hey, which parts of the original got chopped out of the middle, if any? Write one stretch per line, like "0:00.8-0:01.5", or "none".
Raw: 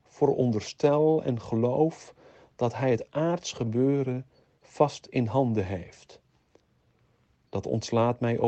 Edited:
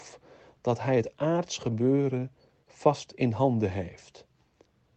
none